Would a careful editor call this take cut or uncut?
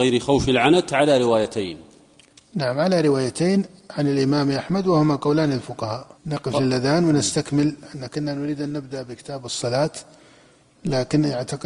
cut